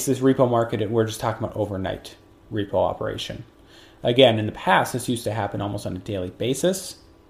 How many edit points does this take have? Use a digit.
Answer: 0